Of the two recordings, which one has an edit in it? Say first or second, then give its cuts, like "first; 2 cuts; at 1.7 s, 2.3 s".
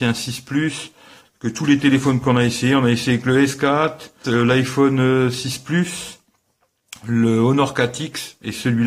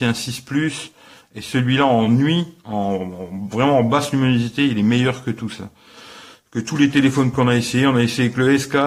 first; 2 cuts; at 1.2 s, 4.2 s